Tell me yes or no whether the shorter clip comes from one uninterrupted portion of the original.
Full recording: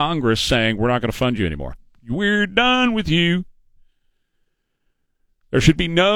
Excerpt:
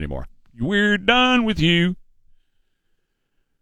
yes